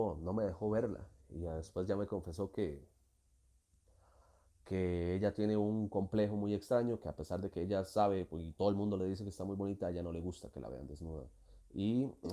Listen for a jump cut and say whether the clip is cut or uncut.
uncut